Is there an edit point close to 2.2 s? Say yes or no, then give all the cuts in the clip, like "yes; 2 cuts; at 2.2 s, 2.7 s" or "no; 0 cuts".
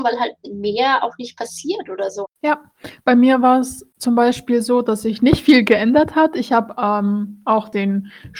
yes; 1 cut; at 2.2 s